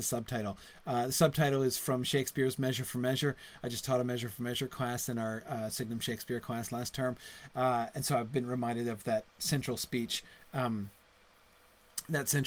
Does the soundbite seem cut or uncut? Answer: uncut